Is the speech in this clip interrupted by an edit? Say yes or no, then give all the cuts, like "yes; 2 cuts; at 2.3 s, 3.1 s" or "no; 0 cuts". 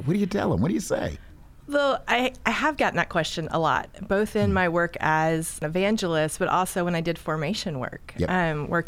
no; 0 cuts